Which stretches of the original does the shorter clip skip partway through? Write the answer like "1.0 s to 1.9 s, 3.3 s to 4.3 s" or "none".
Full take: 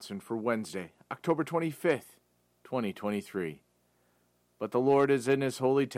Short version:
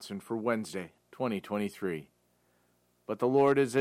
1.0 s to 2.5 s